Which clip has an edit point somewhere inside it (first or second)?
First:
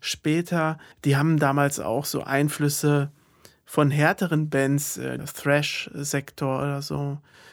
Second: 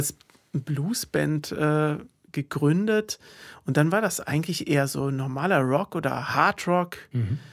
first